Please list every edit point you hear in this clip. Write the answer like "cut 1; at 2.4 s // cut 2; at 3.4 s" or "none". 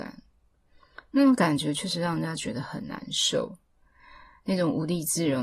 none